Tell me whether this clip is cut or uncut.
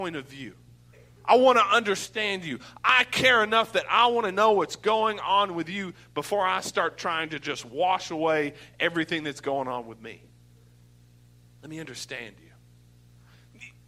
uncut